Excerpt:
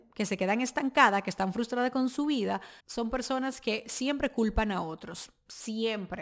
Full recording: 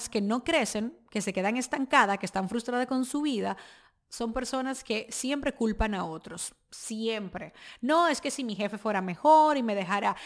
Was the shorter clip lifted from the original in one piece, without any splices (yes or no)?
no